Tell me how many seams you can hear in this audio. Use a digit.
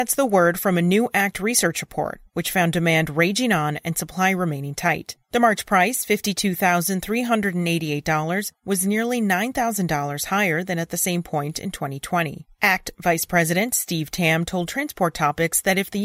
1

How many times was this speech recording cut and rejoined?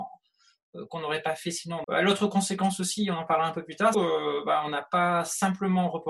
2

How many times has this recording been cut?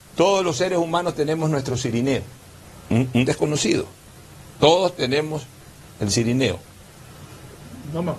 2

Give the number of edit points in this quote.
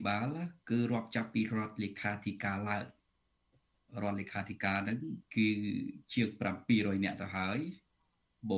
1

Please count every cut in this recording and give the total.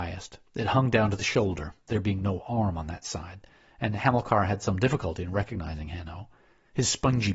0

